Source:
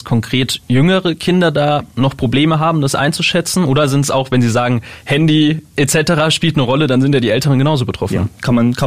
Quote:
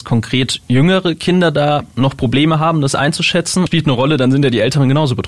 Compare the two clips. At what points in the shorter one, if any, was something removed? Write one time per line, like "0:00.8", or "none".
0:03.7